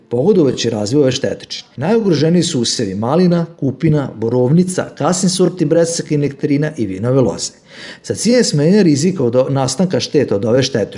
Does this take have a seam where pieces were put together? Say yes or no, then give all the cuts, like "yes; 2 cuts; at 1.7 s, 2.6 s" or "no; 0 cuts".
yes; 1 cut; at 1.7 s